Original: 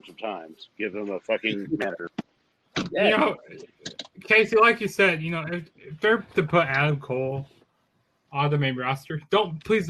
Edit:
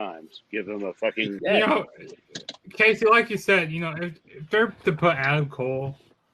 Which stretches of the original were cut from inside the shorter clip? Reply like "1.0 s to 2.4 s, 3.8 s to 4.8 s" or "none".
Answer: 1.7 s to 2.9 s